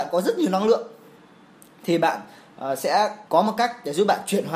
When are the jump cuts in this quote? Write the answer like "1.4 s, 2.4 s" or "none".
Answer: 3.2 s